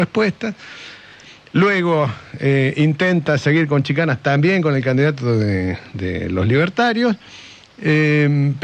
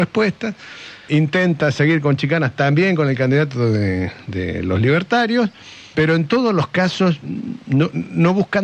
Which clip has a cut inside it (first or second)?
second